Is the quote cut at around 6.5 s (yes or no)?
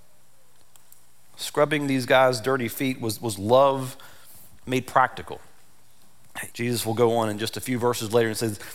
yes